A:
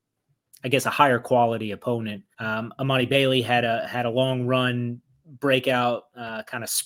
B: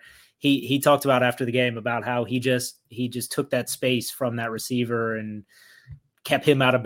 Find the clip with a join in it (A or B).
A